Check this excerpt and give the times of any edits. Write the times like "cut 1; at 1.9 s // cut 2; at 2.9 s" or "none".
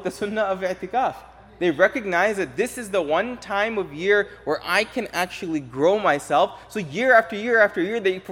none